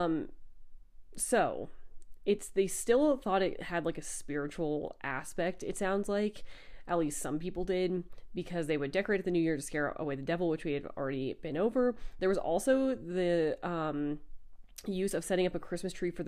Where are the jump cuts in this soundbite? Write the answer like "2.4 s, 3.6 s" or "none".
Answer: none